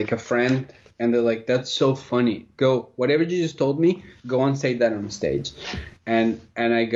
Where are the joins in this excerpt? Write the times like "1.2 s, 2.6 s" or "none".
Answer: none